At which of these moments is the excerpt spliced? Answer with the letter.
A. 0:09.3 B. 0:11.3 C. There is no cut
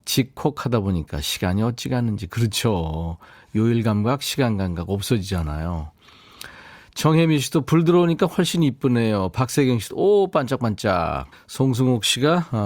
B